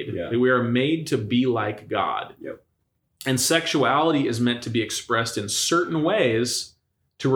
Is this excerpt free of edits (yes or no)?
yes